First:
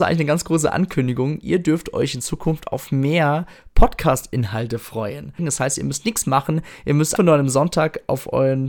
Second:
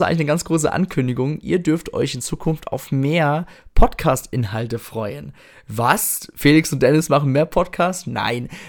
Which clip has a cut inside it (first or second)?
first